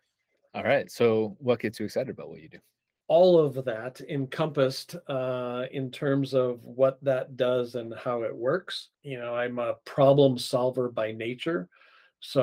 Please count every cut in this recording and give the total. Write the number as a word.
zero